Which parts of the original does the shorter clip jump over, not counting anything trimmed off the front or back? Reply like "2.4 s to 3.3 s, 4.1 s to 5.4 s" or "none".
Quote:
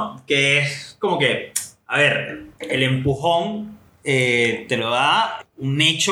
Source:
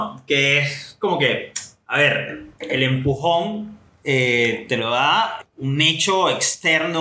none

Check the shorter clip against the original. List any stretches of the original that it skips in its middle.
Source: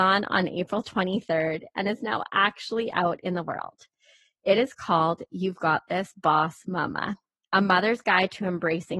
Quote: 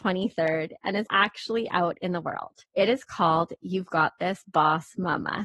2.0 s to 2.3 s, 3.9 s to 4.4 s

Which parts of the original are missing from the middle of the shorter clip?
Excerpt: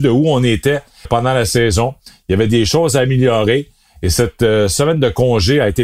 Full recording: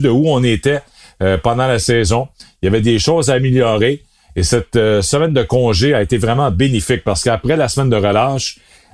1.1 s to 1.4 s

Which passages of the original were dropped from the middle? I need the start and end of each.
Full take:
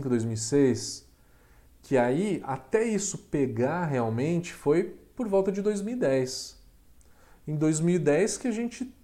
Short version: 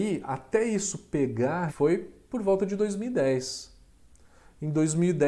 3.9 s to 4.5 s

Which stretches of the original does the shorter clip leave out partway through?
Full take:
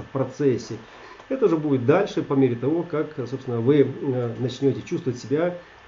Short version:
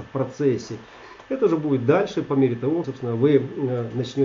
2.8 s to 3.3 s

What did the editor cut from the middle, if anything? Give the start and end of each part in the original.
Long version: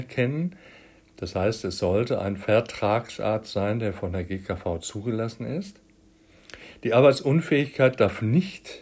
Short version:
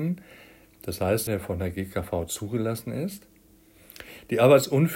1.6 s to 3.8 s

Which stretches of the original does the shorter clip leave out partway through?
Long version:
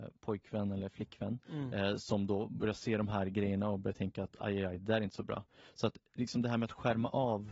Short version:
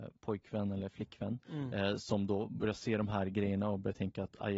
none

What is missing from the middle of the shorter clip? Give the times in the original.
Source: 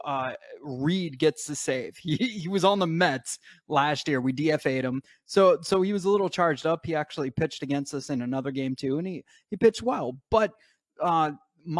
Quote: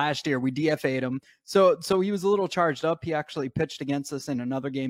none

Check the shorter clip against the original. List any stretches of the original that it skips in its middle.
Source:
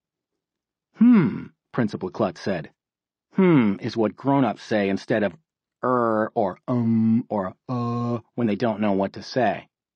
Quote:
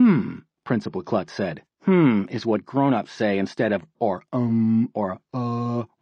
2.8 s to 3.2 s, 5.5 s to 6.3 s

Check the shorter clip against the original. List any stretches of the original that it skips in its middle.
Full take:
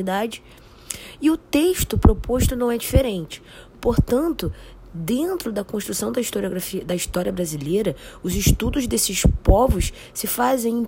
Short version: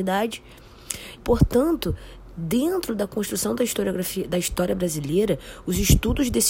1.2 s to 3.7 s

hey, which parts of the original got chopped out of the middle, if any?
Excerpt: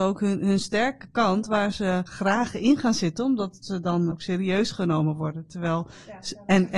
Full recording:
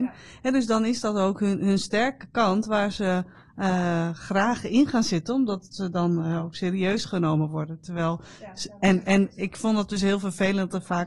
3.3 s to 4.2 s, 6.2 s to 6.5 s

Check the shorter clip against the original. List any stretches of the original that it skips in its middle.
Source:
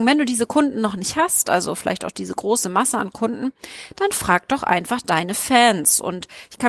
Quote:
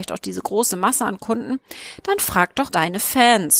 4.6 s to 5.0 s

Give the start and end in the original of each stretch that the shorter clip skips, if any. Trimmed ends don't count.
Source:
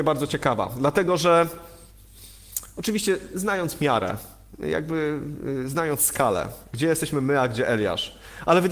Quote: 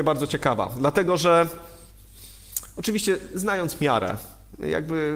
none

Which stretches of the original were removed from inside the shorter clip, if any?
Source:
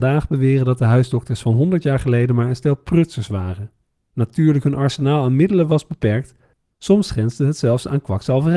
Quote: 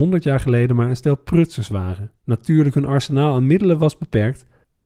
3.8 s to 4.1 s

